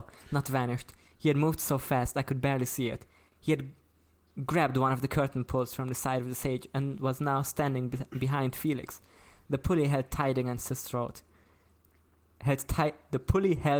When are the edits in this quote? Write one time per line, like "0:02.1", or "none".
none